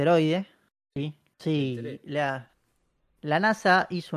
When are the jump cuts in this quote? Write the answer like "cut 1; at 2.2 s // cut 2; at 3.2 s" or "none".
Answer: cut 1; at 1.3 s